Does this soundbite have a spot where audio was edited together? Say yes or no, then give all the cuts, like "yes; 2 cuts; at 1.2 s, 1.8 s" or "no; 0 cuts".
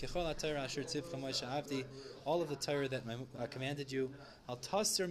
yes; 1 cut; at 3.3 s